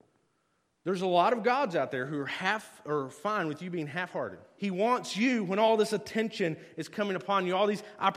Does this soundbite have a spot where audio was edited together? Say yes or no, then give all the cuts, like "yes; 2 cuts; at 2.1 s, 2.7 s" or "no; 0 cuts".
yes; 1 cut; at 4.6 s